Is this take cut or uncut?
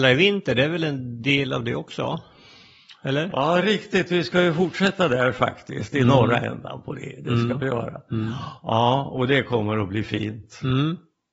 uncut